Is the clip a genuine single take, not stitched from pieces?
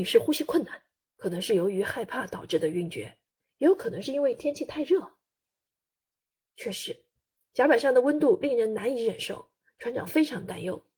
no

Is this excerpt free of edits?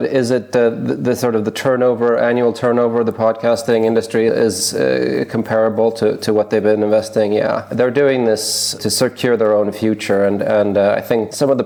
yes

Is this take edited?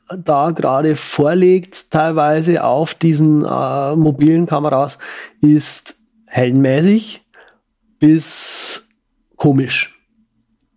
no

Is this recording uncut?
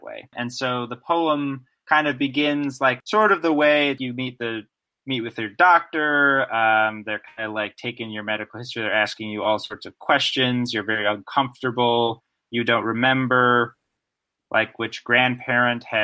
no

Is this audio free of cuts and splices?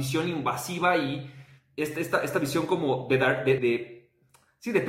no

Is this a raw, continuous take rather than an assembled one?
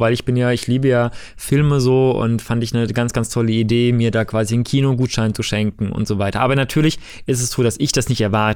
yes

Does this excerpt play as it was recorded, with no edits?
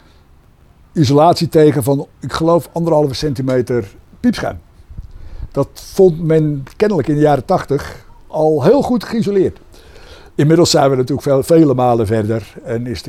no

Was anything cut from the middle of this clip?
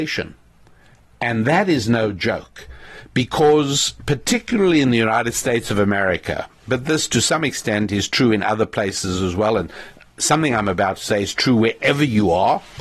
no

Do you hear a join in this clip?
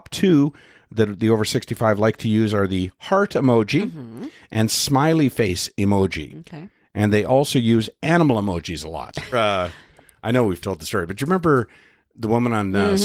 yes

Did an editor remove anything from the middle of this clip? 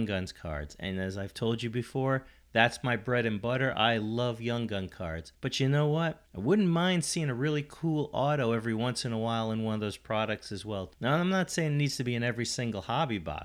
no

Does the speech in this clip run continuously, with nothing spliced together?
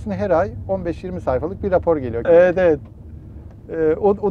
no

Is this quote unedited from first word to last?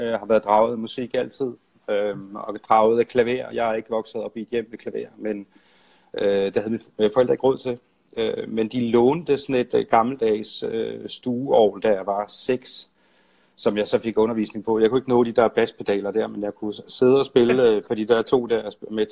yes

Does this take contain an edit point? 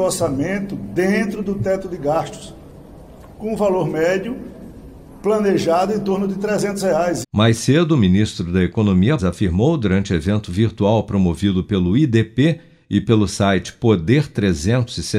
yes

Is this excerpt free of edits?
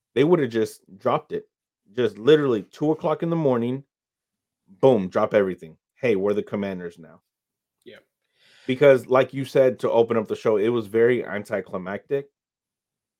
yes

